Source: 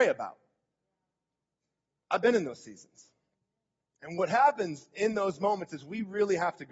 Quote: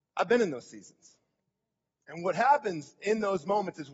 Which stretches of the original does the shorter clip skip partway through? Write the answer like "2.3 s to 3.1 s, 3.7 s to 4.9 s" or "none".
none